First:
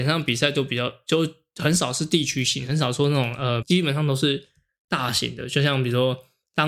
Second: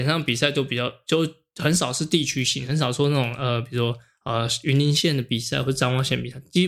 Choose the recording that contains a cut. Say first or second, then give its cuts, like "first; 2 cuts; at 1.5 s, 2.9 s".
first; 1 cut; at 3.6 s